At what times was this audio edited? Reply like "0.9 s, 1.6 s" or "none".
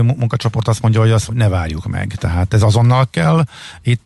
1.3 s